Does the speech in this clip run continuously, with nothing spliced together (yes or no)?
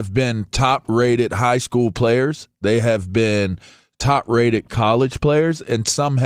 yes